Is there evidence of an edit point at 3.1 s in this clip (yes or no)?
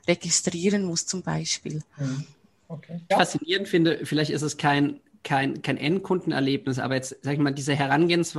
yes